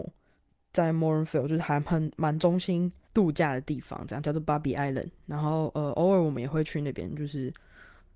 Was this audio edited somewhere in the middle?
yes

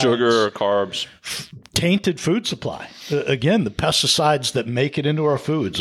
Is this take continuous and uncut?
yes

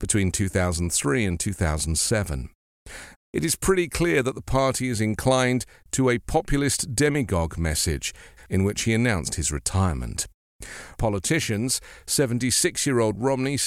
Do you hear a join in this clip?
yes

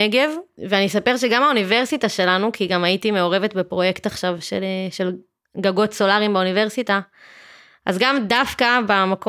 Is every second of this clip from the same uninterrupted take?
yes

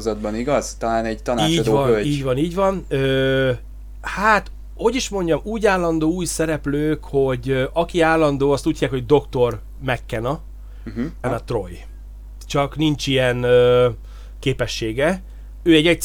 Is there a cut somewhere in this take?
yes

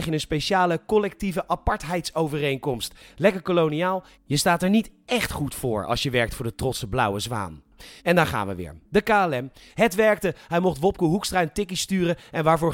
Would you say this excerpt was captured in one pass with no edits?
no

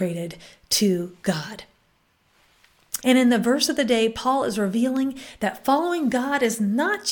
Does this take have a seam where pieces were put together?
yes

